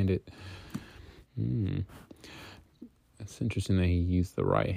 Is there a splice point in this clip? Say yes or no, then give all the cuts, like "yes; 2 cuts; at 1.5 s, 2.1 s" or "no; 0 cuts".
yes; 1 cut; at 1.2 s